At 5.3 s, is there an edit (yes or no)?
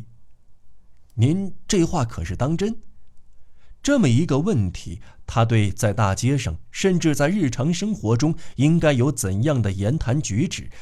no